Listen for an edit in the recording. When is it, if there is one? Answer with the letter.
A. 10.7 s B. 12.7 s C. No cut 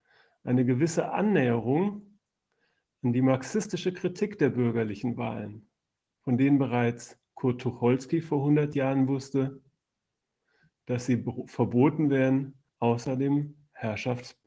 B